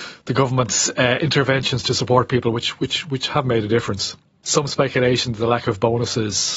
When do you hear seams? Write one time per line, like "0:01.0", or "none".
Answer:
0:04.4